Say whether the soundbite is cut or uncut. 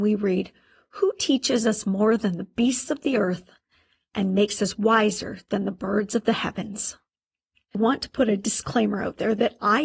cut